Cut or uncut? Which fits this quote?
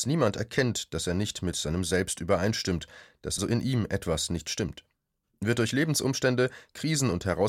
cut